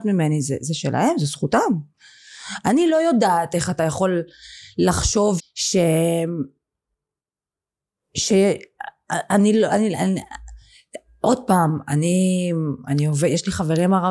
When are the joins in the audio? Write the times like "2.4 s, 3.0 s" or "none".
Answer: 5.4 s